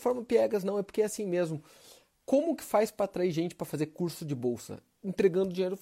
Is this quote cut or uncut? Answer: uncut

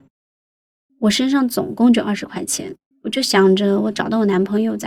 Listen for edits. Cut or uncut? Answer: cut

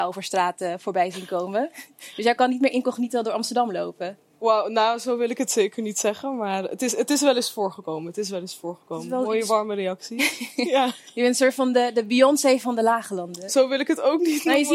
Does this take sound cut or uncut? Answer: uncut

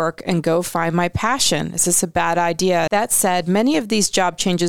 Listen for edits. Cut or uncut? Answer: cut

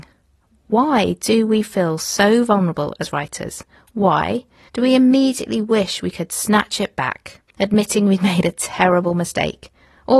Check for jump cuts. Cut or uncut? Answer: cut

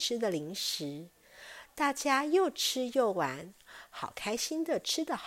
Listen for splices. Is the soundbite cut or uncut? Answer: uncut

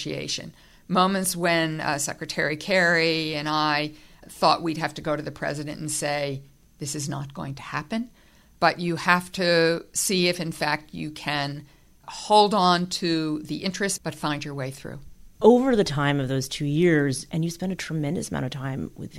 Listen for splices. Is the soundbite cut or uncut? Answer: cut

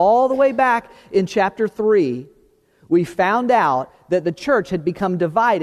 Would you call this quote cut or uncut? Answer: uncut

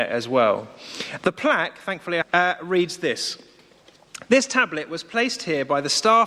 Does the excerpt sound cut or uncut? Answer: cut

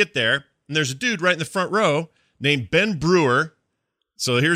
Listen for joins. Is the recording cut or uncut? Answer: uncut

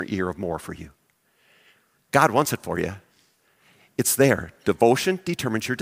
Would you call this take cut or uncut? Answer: uncut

